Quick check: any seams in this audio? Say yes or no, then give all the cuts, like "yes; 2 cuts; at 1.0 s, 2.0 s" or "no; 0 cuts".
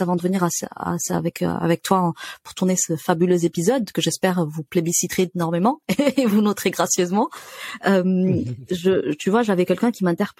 no; 0 cuts